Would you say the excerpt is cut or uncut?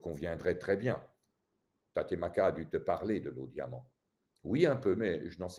cut